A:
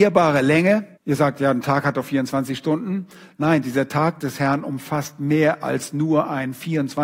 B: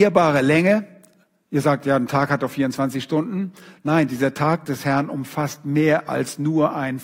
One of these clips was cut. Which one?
A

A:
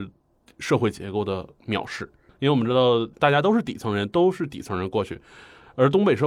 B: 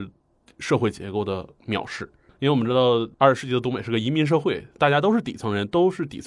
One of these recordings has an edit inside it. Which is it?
A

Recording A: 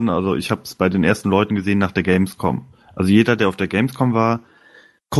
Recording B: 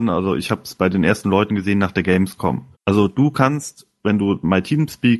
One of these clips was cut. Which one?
B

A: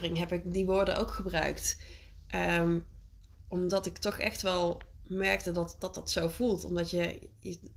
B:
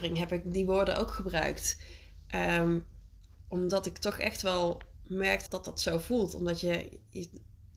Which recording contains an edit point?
B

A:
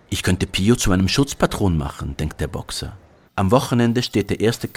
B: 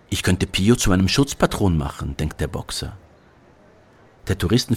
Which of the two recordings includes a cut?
A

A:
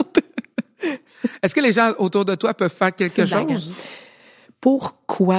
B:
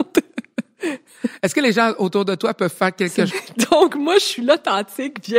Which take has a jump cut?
B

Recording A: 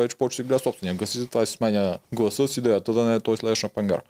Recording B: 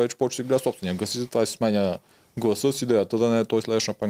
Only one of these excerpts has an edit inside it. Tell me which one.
A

